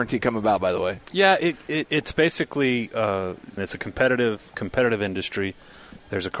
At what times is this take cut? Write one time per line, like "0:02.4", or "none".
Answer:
0:01.0
0:03.6